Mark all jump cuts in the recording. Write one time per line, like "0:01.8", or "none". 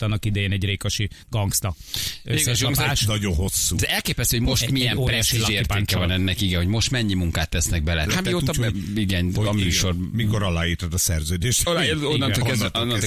0:08.1